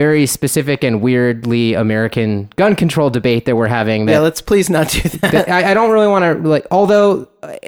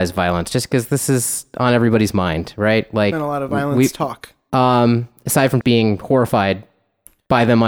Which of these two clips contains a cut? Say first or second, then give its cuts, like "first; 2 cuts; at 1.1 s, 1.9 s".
second; 2 cuts; at 4.5 s, 5.6 s